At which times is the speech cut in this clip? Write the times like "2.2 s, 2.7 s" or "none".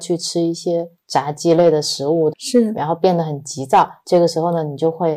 2.3 s